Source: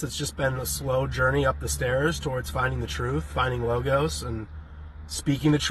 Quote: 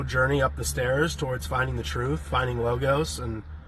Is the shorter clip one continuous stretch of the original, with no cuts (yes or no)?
yes